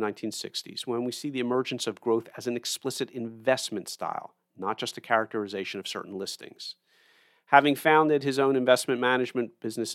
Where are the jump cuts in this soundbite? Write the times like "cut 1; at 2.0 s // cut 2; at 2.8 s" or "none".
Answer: none